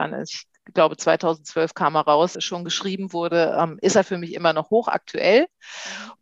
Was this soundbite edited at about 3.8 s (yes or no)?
no